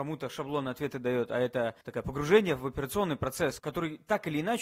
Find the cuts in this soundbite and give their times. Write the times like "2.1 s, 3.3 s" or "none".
1.8 s, 3.6 s